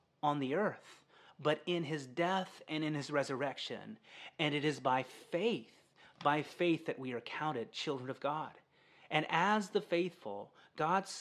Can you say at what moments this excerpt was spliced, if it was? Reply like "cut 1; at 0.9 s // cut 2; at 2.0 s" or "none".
none